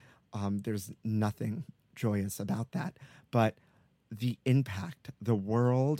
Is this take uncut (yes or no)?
yes